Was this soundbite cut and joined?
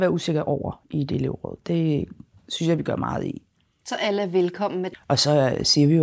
yes; 1 cut; at 4.9 s

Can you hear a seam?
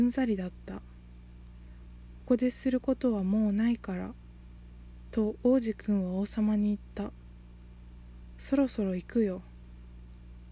yes; 1 cut; at 2.2 s

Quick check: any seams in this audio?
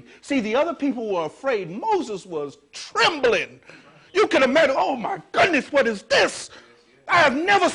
no; 0 cuts

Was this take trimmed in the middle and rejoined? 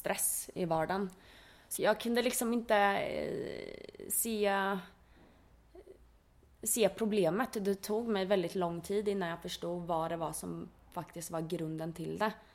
yes; 1 cut; at 1.7 s

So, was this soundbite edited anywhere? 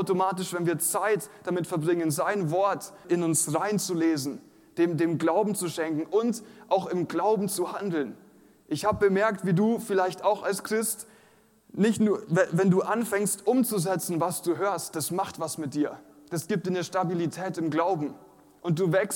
yes; 1 cut; at 3.0 s

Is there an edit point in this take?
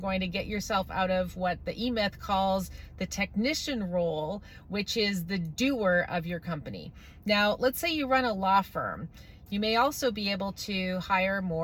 yes; 1 cut; at 9.5 s

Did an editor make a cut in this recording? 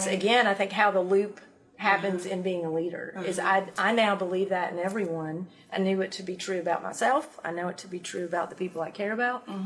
no; 0 cuts

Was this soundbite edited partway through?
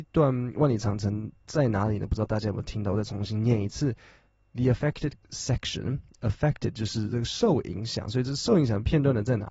no; 0 cuts

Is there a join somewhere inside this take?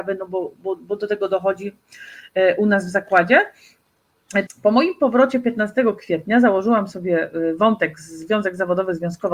yes; 1 cut; at 4.5 s

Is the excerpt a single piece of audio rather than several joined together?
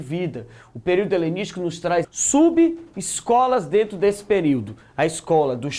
no; 1 cut; at 2.0 s

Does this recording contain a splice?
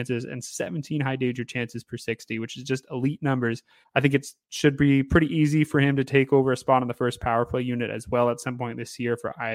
yes; 1 cut; at 3.8 s

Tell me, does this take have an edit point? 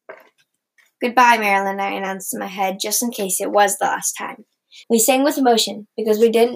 yes; 1 cut; at 4.8 s

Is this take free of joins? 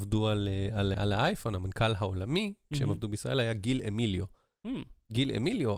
no; 1 cut; at 0.9 s

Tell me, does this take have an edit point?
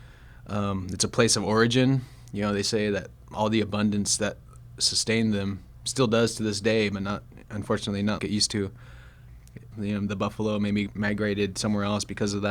yes; 2 cuts; at 8.2 s, 9.7 s

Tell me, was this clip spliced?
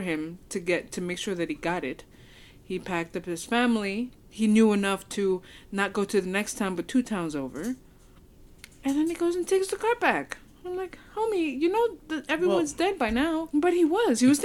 yes; 1 cut; at 13.5 s

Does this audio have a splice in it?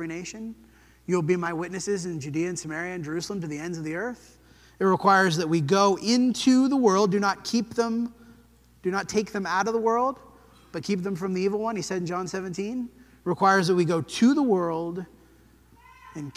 no; 0 cuts

